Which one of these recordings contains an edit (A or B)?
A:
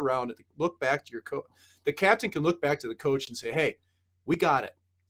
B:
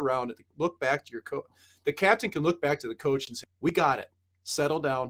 B